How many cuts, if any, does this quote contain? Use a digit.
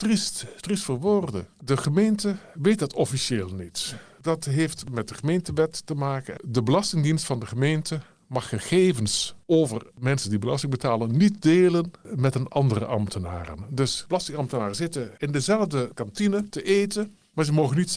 1